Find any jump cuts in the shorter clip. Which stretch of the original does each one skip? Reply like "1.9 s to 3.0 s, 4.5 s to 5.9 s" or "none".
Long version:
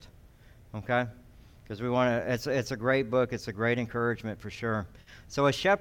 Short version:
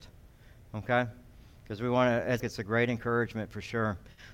2.4 s to 3.3 s